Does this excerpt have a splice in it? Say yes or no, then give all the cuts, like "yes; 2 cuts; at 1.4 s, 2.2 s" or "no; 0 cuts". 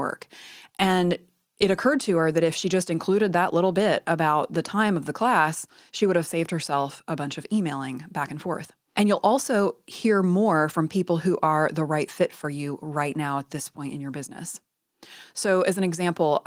yes; 1 cut; at 8.9 s